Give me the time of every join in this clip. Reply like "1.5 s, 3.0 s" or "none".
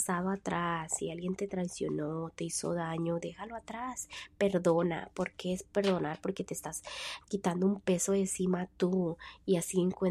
7.2 s

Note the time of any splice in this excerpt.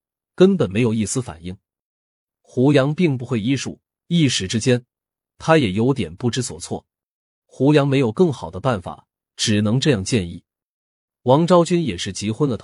7.4 s

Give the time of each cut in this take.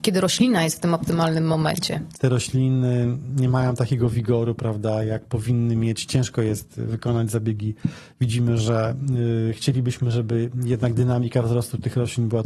2.1 s

